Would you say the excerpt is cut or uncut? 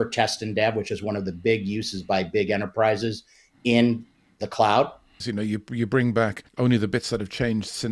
cut